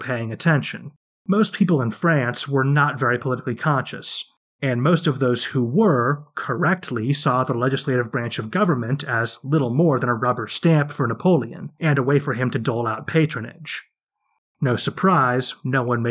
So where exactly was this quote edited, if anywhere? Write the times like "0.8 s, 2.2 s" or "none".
none